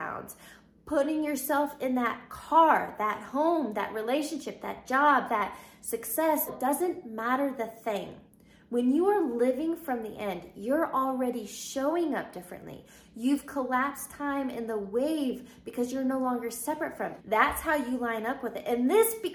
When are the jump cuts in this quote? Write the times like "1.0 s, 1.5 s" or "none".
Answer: 6.5 s, 17.2 s